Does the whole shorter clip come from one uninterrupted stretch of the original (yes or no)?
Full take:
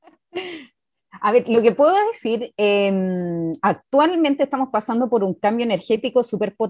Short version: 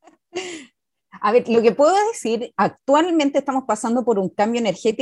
no